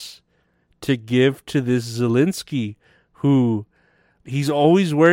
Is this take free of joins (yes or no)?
yes